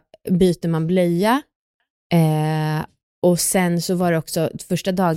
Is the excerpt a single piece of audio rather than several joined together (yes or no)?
yes